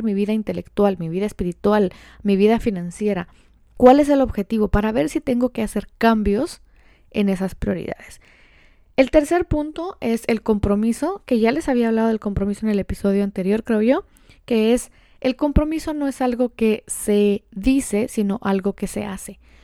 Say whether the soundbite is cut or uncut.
uncut